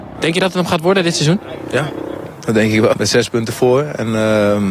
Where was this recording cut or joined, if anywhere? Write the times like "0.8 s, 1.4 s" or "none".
2.9 s